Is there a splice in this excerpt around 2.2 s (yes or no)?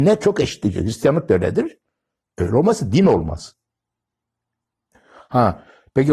yes